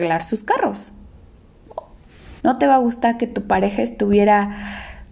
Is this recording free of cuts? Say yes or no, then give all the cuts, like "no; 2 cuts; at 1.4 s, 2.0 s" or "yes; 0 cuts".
no; 1 cut; at 2.4 s